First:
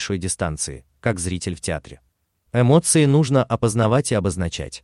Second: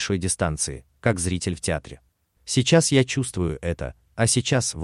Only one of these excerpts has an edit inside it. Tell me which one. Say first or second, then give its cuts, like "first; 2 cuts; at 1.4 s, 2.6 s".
second; 1 cut; at 2.4 s